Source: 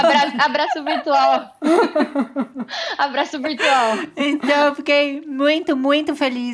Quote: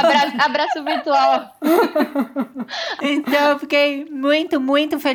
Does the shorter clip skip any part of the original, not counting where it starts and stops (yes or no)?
yes